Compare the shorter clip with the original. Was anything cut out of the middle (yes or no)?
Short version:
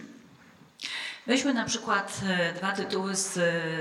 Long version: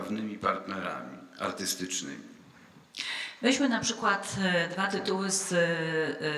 no